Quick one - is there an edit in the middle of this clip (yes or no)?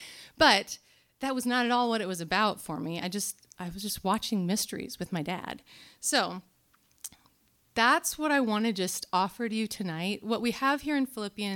no